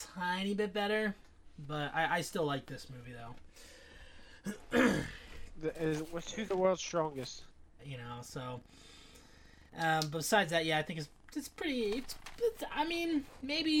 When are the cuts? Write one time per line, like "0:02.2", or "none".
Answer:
0:07.8
0:09.7